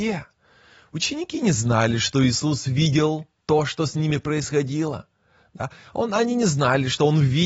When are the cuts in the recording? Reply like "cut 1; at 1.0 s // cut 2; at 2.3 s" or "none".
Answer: none